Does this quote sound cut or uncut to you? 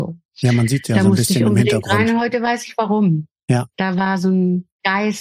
uncut